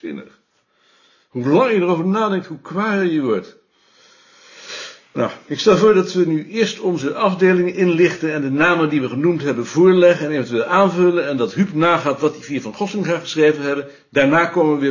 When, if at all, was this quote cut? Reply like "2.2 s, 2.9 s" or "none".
none